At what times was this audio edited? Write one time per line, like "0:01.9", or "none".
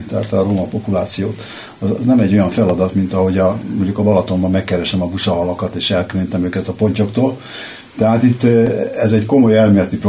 none